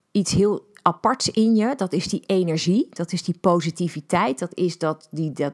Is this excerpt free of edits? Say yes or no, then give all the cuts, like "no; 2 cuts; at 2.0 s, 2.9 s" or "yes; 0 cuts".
yes; 0 cuts